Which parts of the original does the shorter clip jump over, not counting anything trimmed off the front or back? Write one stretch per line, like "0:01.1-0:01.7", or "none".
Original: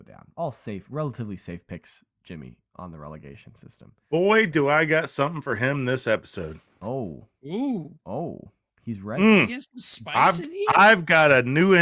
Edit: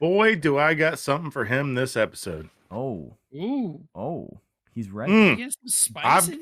none